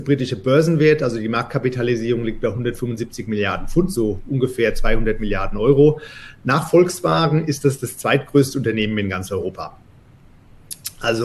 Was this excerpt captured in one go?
yes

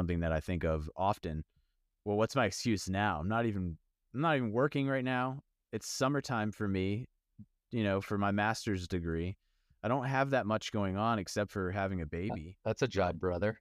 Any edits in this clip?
no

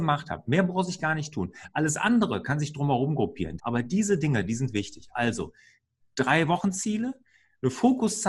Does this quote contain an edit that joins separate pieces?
yes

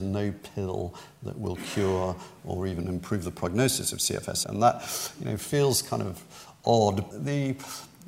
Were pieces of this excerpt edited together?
yes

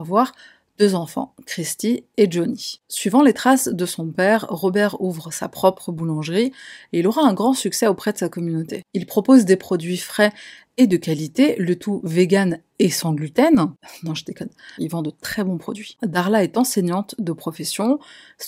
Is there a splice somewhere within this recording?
yes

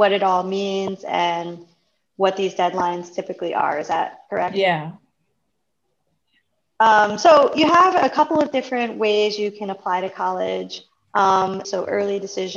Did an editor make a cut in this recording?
yes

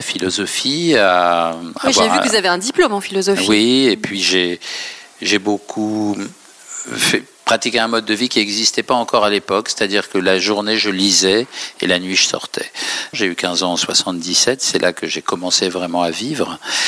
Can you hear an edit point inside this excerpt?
yes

